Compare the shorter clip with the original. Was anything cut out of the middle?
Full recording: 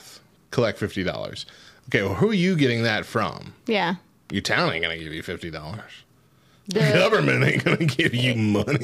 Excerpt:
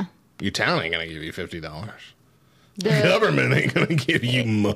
no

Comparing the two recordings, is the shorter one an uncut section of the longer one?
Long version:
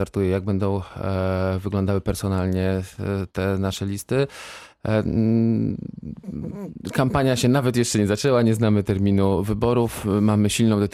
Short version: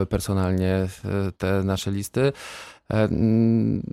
yes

